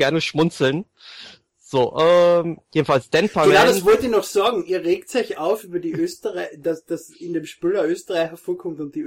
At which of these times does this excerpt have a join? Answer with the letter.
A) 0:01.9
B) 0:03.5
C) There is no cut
C